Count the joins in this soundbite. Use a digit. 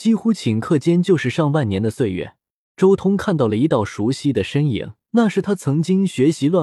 2